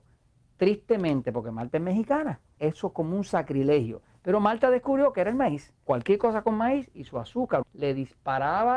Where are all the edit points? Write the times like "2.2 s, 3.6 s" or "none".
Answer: 2.6 s, 5.9 s, 7.6 s